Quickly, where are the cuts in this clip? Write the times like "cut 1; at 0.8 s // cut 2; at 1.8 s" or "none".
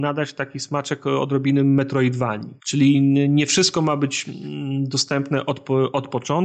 cut 1; at 2.6 s

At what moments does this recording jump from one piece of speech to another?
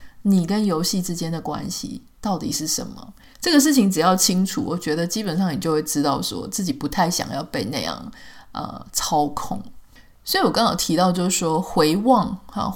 cut 1; at 3.3 s

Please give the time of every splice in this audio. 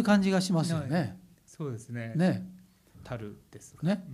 cut 1; at 2.9 s

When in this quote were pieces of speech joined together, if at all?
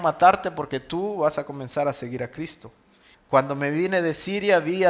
cut 1; at 3.1 s

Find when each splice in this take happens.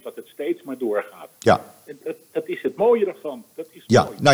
cut 1; at 2.0 s

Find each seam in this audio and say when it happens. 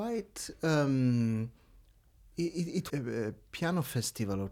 cut 1; at 2.9 s

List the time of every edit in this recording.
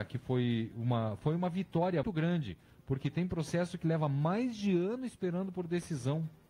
cut 1; at 2.0 s

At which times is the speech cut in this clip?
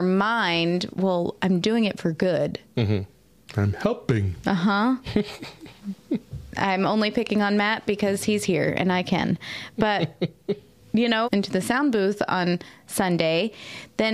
cut 1; at 0.9 s // cut 2; at 3.4 s // cut 3; at 11.2 s

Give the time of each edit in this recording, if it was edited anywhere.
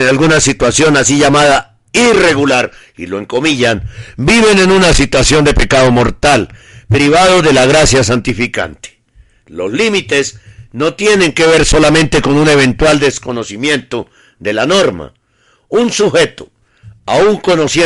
none

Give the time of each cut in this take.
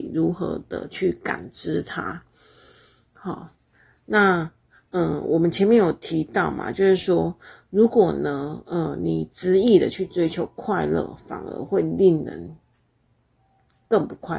none

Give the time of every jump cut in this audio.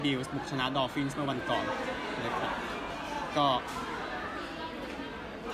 none

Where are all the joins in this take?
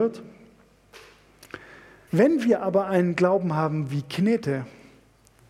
cut 1; at 2.1 s

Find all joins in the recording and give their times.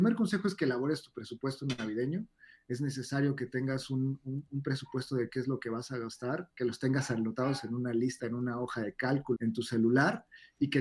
cut 1; at 8.2 s // cut 2; at 9.3 s

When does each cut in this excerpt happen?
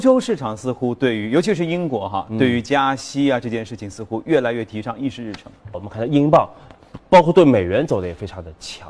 cut 1; at 5.7 s

